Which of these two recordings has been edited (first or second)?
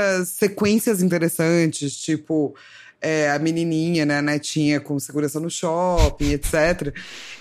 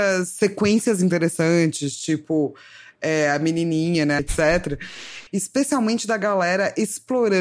second